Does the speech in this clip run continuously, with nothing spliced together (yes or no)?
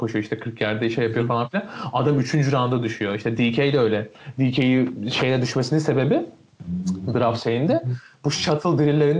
yes